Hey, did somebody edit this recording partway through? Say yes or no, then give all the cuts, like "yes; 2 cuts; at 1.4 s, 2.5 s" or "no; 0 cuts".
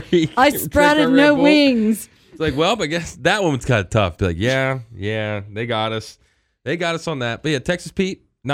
no; 0 cuts